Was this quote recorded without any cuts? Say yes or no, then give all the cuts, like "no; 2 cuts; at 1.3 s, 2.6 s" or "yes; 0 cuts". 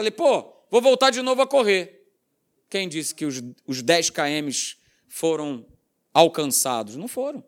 yes; 0 cuts